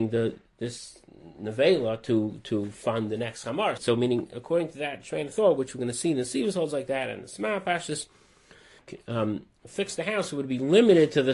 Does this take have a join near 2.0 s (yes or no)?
no